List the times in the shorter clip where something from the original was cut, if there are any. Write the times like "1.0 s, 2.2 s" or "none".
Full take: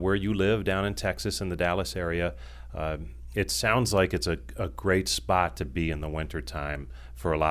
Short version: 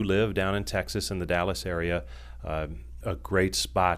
3.0 s